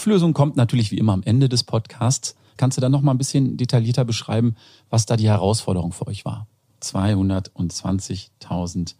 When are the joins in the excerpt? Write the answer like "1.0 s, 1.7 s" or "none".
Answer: 2.6 s, 6.7 s